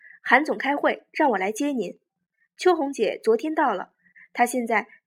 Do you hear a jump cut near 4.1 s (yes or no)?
yes